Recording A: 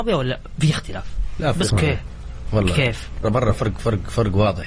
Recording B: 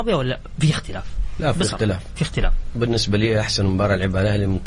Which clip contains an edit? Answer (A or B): A